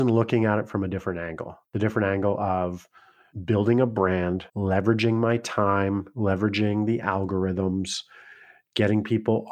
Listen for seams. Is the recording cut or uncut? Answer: cut